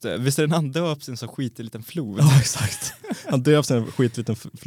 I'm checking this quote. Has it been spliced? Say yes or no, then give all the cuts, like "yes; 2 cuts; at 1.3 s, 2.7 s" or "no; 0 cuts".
no; 0 cuts